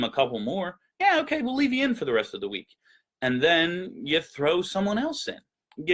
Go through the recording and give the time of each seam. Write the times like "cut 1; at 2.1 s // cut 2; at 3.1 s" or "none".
none